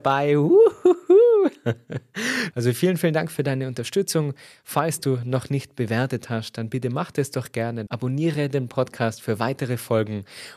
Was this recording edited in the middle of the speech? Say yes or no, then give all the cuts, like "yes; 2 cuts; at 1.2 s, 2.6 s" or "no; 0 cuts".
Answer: yes; 2 cuts; at 2.5 s, 7.9 s